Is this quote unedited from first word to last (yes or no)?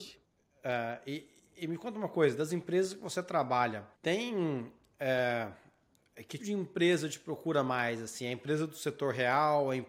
no